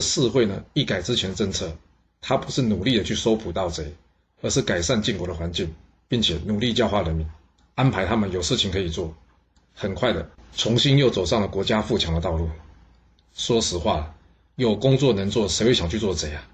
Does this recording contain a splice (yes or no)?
yes